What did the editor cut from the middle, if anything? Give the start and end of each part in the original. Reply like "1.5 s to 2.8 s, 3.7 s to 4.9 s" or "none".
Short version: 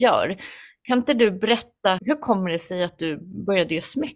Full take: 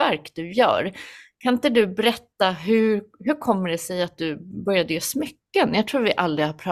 2.5 s to 3.2 s